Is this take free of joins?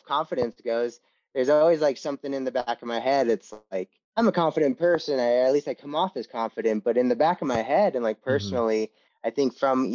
yes; 0 cuts

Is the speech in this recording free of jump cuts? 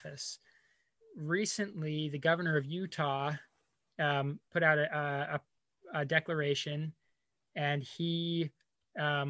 yes; 0 cuts

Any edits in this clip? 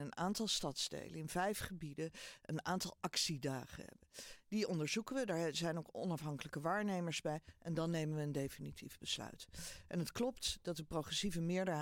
no; 0 cuts

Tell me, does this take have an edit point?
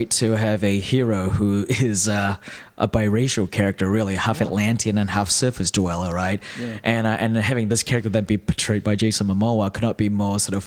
no; 0 cuts

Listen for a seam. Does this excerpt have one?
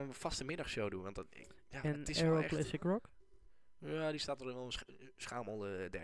no; 0 cuts

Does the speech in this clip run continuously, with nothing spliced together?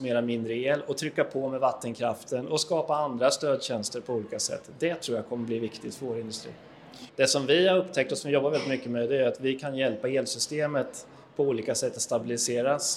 no; 1 cut; at 7.1 s

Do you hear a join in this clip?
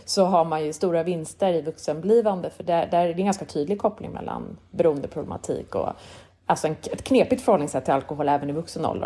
no; 0 cuts

